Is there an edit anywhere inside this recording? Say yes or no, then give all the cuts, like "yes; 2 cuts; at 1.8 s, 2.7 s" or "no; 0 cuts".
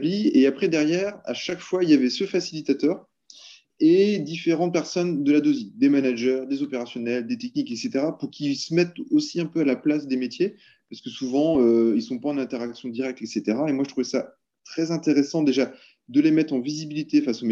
no; 0 cuts